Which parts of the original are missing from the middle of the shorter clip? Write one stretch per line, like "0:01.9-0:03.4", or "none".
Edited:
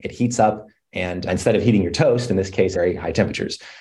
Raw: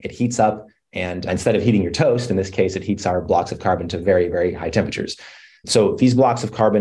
0:02.7-0:04.3